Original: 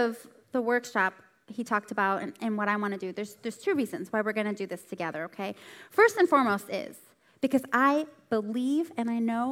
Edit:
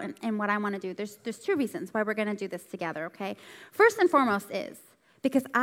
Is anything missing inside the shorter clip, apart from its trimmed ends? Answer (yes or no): no